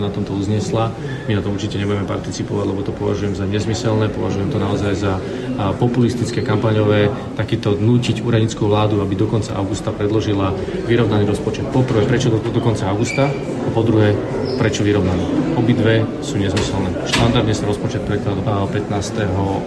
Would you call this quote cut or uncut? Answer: cut